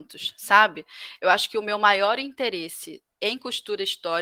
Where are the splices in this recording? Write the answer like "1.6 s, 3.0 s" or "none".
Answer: 3.1 s